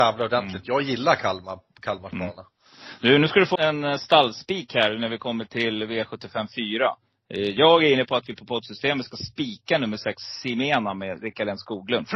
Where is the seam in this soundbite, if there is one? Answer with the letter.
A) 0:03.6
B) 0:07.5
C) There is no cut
A